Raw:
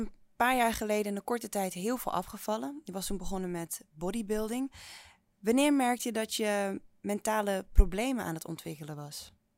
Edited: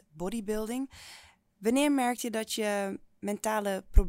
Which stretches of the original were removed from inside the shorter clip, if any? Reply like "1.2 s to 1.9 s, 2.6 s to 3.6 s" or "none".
none